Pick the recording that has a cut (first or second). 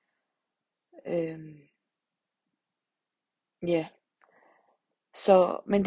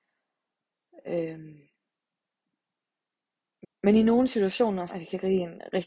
second